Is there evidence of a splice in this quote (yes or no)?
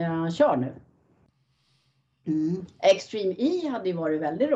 no